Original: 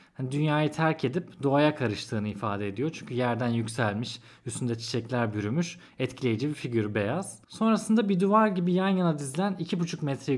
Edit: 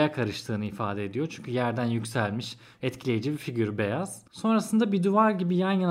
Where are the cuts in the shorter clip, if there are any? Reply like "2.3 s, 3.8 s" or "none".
2.8 s